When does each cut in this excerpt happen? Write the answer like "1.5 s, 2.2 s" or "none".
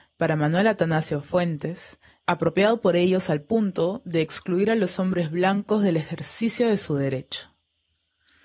2.2 s